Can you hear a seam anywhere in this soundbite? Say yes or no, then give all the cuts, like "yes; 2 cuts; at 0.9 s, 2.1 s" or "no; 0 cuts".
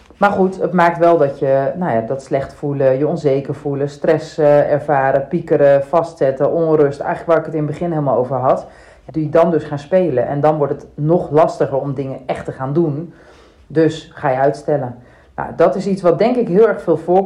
yes; 1 cut; at 9.1 s